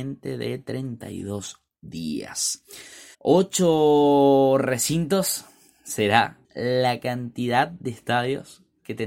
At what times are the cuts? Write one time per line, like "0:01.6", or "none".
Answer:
0:03.1
0:06.4